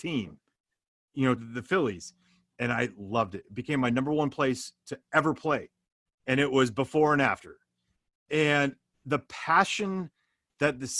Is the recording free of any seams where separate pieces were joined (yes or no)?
no